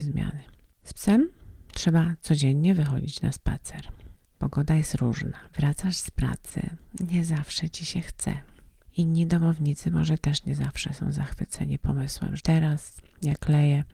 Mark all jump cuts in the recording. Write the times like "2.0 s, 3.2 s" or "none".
5.5 s, 12.4 s